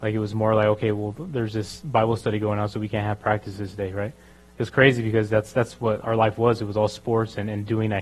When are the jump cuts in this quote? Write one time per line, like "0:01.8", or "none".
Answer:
none